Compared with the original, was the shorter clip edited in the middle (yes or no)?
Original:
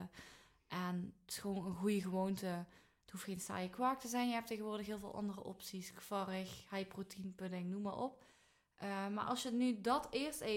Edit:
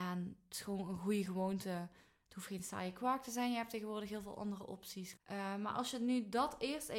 yes